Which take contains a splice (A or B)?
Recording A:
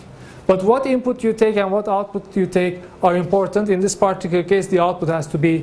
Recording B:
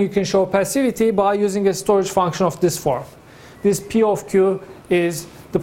B